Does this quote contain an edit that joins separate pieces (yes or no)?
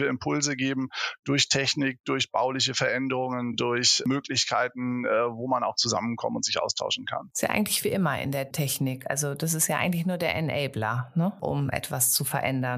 no